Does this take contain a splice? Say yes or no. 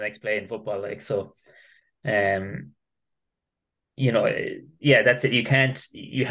no